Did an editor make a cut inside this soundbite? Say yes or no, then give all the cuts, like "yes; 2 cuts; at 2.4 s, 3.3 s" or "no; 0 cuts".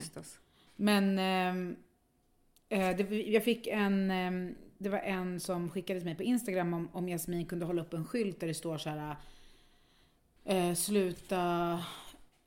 no; 0 cuts